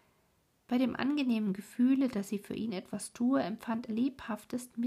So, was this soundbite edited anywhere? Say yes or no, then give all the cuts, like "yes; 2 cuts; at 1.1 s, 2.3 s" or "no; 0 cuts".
yes; 1 cut; at 3.9 s